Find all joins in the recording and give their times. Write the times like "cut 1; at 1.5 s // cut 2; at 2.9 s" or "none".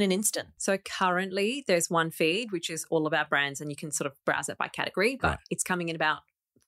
none